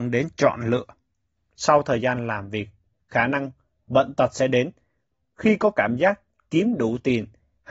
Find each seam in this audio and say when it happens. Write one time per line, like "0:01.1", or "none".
0:01.4
0:02.9